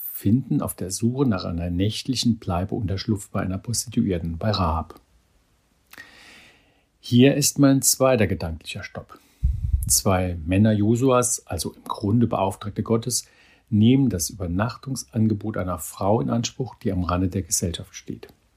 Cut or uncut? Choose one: uncut